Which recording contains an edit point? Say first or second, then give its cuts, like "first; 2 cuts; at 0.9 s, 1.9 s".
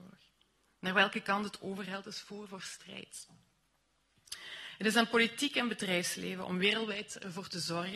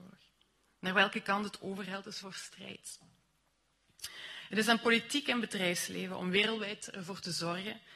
second; 1 cut; at 2.2 s